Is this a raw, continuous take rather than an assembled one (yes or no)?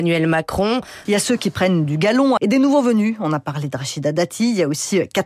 no